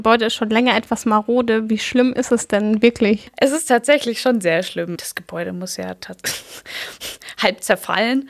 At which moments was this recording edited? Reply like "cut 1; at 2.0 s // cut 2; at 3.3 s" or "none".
cut 1; at 5.0 s